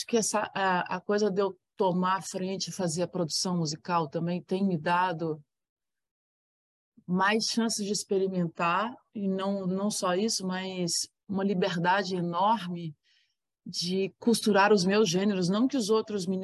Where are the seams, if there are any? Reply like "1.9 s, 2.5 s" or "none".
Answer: none